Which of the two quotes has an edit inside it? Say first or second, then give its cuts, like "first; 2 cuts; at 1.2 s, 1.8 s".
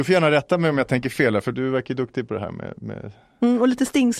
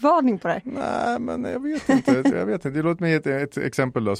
second; 1 cut; at 2.3 s